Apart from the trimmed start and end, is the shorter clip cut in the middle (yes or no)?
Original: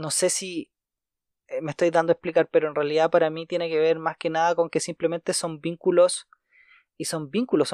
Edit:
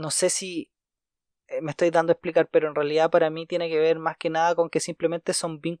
no